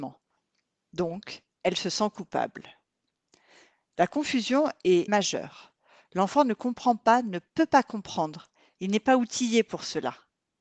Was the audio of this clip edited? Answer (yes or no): yes